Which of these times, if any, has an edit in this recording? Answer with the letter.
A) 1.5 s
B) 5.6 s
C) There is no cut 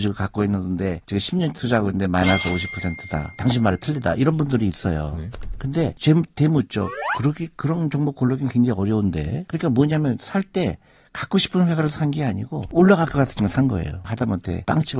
A